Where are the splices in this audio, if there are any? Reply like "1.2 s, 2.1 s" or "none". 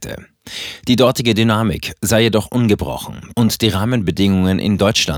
3.3 s